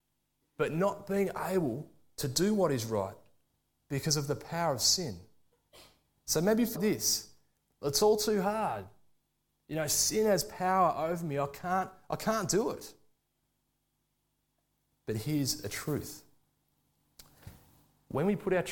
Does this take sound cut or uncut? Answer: cut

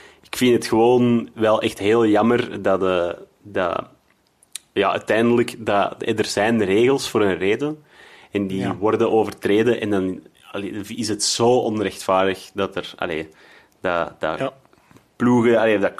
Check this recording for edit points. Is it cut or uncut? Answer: uncut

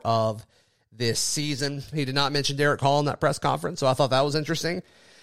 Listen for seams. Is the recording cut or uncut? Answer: cut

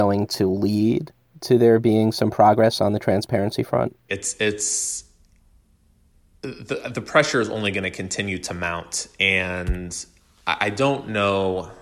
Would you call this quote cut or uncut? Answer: cut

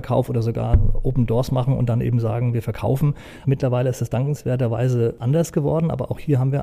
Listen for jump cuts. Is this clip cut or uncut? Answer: cut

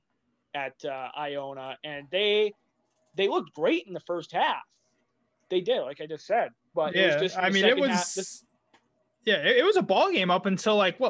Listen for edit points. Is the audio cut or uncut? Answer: uncut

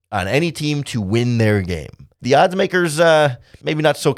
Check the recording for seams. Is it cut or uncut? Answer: cut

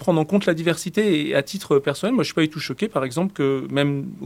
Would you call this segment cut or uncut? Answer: uncut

